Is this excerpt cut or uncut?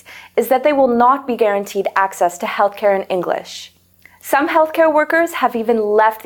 uncut